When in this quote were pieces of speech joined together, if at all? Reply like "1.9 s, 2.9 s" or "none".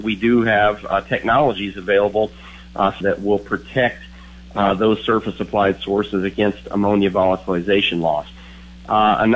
3.0 s